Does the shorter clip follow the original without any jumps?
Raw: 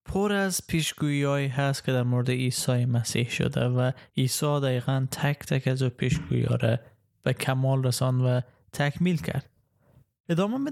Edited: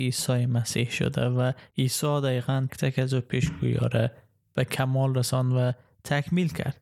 no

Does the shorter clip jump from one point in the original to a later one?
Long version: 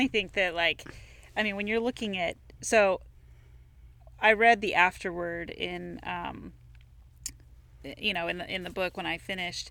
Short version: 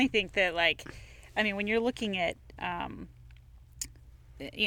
yes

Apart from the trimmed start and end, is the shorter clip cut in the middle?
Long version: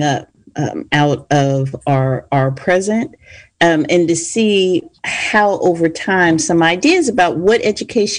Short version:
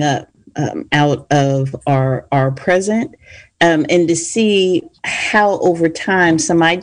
no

